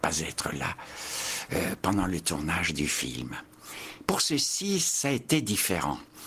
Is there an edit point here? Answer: no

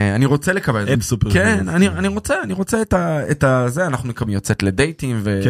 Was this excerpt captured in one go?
no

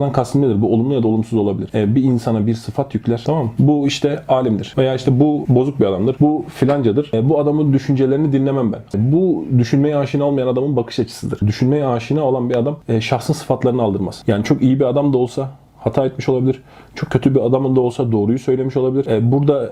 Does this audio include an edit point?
yes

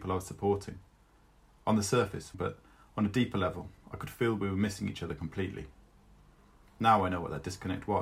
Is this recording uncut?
no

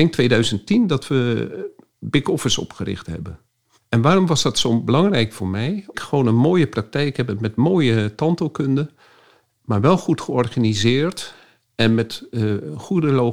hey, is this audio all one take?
no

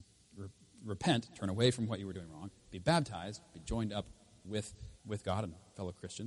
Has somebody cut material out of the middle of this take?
yes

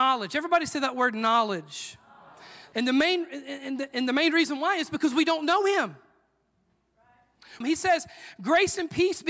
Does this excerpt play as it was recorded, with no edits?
no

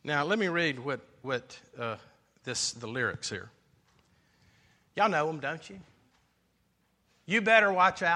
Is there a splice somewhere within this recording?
no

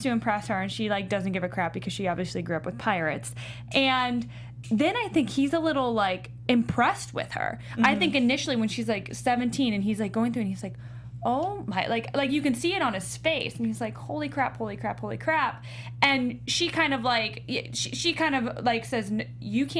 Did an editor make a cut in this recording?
no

